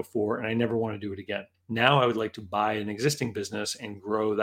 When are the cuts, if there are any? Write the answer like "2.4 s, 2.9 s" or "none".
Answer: 1.5 s